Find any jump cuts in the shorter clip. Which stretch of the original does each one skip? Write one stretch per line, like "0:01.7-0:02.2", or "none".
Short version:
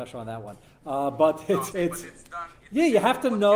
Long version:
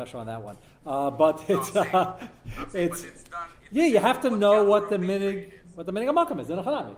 0:01.7-0:02.7